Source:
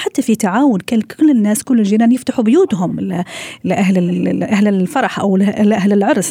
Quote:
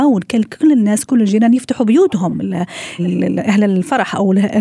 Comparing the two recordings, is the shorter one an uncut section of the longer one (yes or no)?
no